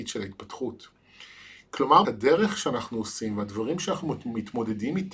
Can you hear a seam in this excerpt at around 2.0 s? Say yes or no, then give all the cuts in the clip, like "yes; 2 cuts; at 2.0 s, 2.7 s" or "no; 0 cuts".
yes; 1 cut; at 2.0 s